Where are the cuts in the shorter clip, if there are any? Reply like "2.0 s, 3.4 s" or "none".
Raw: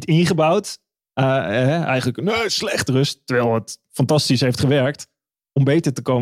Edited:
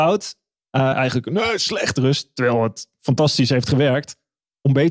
0.9 s